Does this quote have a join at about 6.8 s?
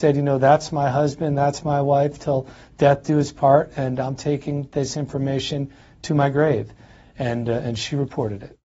no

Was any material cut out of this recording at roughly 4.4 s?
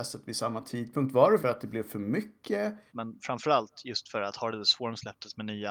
no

